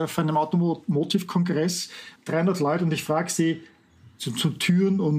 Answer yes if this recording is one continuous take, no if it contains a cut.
yes